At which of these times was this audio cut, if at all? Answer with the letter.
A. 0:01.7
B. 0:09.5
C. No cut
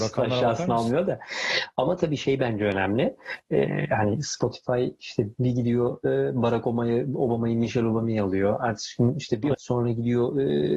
B